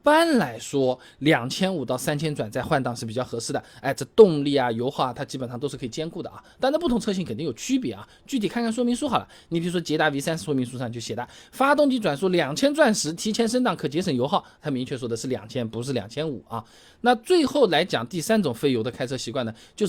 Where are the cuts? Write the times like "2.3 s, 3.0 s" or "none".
none